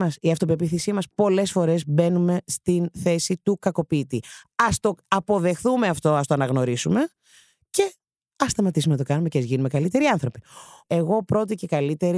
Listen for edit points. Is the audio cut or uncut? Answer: cut